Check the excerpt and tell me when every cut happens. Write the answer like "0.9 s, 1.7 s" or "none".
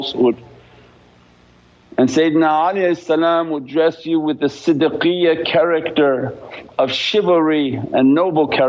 none